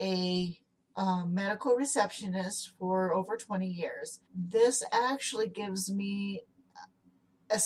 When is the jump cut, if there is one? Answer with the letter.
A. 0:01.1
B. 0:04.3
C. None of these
B